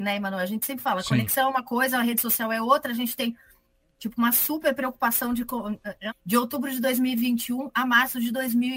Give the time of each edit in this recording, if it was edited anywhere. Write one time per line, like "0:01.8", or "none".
0:06.1